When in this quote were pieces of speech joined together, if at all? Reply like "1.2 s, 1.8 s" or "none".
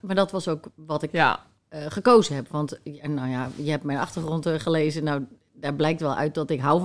none